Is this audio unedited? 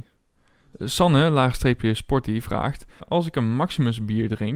yes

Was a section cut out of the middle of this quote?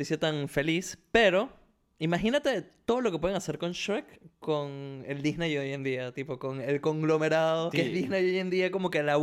yes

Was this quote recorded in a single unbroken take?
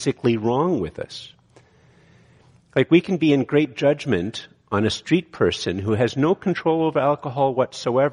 yes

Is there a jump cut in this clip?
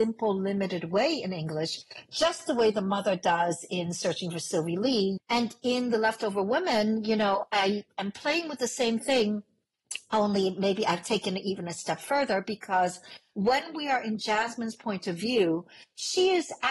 yes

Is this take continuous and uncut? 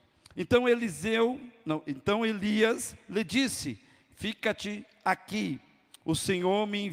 yes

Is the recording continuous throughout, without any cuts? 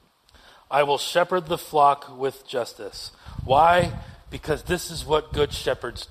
yes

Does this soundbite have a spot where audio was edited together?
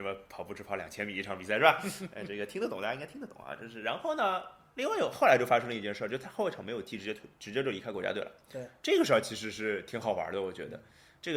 no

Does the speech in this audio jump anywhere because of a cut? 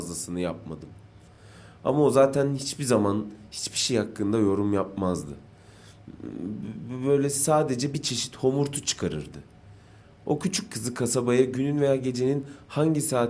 no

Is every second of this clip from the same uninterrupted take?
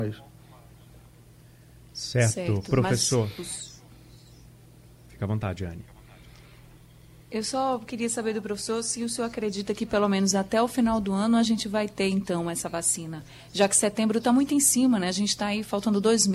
yes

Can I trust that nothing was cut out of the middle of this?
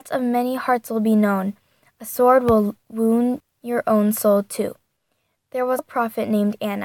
no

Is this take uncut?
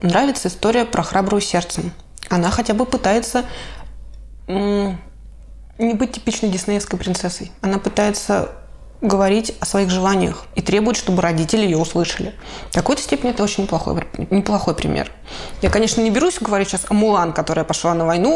no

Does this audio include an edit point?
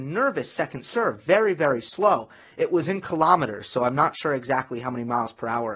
no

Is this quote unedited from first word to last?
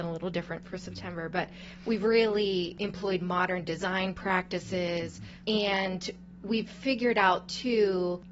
no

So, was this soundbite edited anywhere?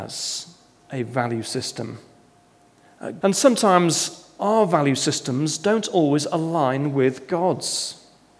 yes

